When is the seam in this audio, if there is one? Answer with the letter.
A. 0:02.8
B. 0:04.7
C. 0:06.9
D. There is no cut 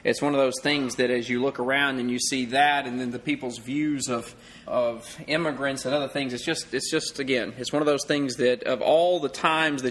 B